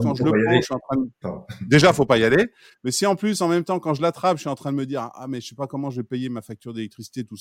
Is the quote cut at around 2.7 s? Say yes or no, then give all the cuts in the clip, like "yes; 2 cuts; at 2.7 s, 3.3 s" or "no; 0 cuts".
no; 1 cut; at 1.2 s